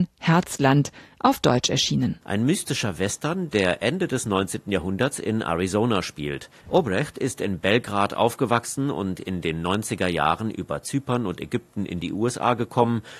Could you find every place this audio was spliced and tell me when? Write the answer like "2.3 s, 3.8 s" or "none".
none